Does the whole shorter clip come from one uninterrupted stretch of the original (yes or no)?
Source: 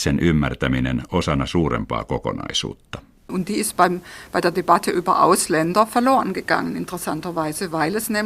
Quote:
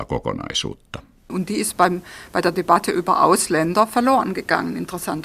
yes